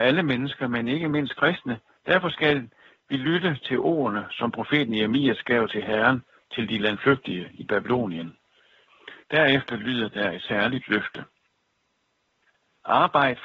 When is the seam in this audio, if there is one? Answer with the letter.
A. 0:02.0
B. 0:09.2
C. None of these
B